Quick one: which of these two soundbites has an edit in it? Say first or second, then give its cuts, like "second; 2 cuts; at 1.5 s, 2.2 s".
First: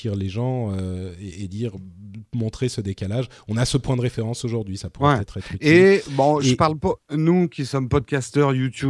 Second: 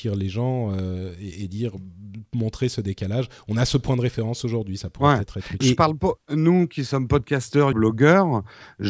second; 2 cuts; at 5.6 s, 7.7 s